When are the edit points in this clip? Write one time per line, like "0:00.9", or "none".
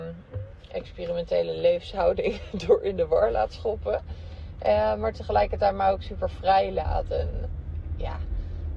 none